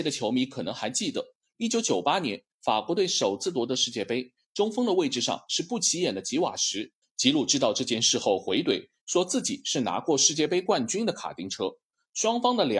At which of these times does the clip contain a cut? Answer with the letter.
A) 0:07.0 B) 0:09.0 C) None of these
A